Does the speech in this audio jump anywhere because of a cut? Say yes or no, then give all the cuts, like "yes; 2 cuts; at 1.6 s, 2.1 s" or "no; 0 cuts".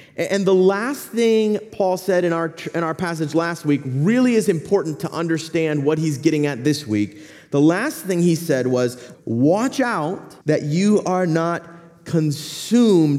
yes; 2 cuts; at 9.1 s, 10.4 s